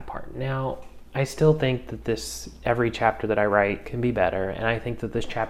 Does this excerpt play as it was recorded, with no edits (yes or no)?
yes